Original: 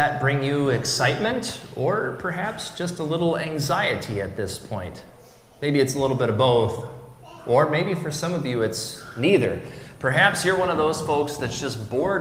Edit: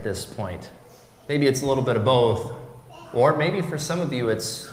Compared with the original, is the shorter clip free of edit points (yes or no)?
yes